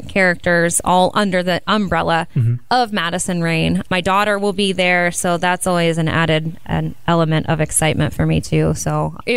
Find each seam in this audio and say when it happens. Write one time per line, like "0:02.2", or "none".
0:03.8